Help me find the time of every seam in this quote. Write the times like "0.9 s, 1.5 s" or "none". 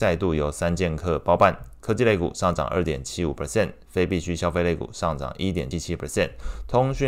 5.7 s